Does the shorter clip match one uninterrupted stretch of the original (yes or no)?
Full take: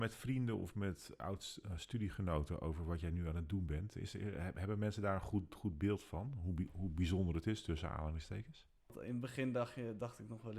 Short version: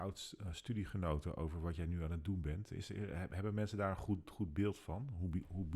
yes